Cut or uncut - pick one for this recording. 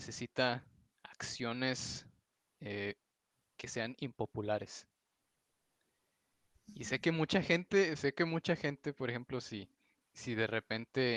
uncut